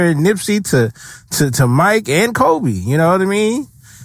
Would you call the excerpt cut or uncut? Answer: uncut